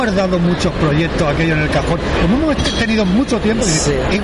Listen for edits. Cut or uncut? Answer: cut